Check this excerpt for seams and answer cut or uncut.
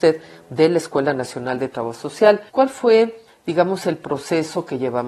cut